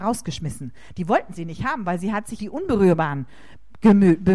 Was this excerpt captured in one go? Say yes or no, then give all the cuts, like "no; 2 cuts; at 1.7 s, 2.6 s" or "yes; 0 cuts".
no; 1 cut; at 2.4 s